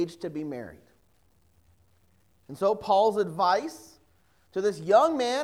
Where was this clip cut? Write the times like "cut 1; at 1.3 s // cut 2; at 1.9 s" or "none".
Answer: none